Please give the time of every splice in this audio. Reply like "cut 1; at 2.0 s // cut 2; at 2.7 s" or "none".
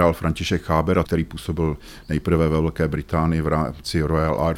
cut 1; at 1.0 s